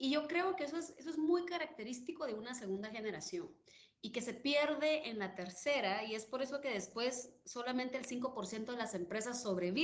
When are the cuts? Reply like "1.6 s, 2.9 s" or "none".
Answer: none